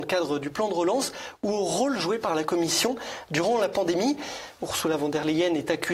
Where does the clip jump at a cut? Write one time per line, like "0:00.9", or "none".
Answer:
0:04.6